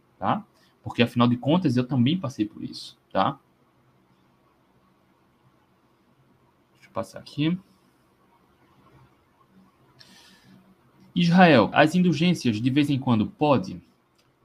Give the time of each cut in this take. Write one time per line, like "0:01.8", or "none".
0:11.7